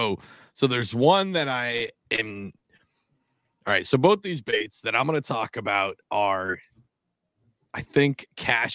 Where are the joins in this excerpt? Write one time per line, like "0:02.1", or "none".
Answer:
none